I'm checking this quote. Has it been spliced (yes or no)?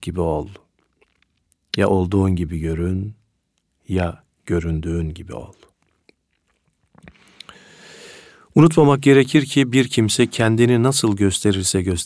no